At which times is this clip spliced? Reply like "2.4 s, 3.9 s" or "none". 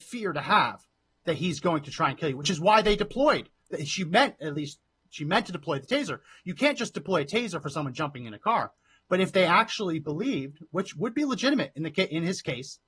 none